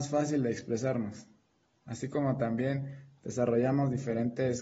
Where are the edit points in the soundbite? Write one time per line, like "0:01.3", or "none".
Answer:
none